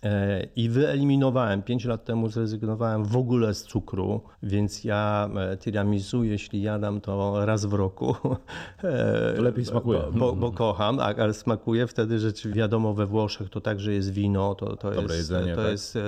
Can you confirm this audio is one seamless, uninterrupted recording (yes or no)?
no